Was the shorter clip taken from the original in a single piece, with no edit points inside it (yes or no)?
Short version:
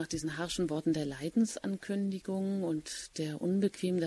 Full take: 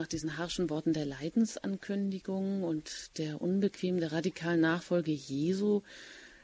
yes